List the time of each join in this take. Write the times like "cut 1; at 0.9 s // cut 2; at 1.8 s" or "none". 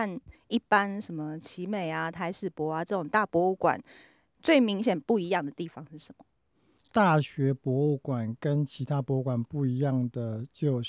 none